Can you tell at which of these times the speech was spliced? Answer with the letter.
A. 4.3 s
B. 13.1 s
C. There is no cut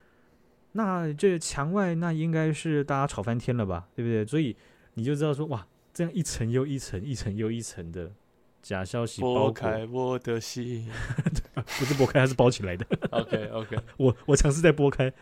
A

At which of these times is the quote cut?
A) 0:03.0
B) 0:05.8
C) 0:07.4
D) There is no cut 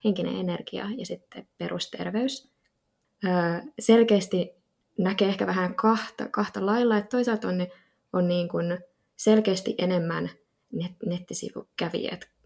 A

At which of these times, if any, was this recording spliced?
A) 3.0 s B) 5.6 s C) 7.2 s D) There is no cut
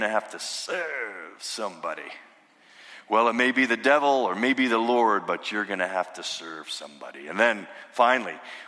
D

